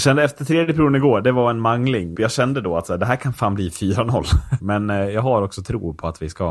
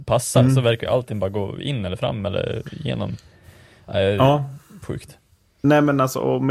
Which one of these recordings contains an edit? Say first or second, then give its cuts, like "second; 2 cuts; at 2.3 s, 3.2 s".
first; 2 cuts; at 2.1 s, 4.6 s